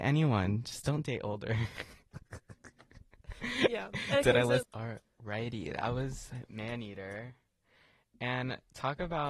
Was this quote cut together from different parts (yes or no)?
yes